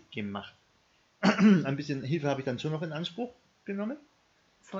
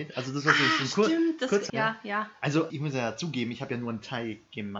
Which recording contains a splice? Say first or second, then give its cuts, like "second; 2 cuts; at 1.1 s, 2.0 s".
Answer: second; 2 cuts; at 1.7 s, 2.7 s